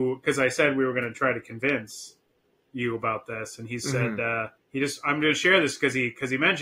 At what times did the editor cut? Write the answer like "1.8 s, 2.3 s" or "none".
4.6 s